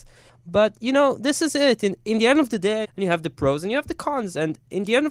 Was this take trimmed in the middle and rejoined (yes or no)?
yes